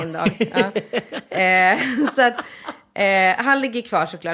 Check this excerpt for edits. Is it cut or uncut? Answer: uncut